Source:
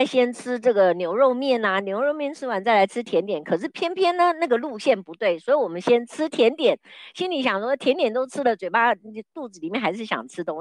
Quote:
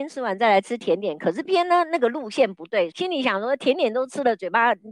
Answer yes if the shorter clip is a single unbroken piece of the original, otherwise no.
no